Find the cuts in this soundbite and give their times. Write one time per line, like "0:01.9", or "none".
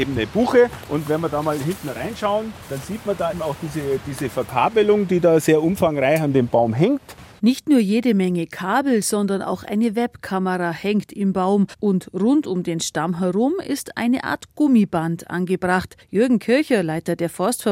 0:03.3